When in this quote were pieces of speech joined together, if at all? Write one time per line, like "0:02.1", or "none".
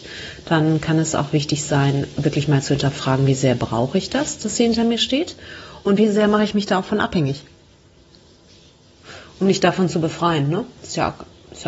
0:10.8